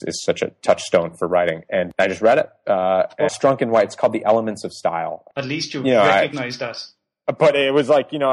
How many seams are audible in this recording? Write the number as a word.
two